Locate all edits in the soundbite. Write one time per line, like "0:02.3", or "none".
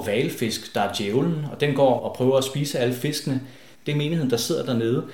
0:02.0
0:03.7